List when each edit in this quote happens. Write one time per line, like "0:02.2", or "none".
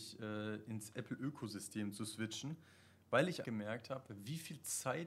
0:03.4